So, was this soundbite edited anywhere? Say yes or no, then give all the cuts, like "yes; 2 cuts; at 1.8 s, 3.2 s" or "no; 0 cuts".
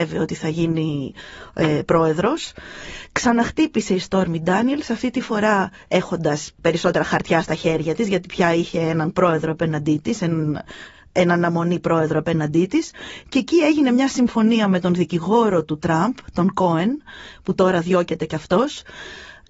no; 0 cuts